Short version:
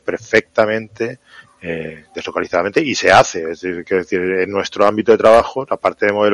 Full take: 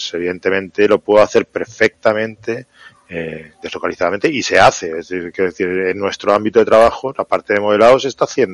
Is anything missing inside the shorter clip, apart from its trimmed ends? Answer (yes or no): no